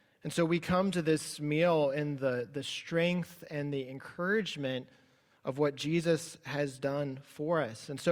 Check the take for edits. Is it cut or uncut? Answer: uncut